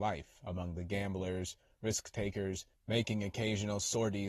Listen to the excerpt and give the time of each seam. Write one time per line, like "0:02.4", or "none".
0:02.7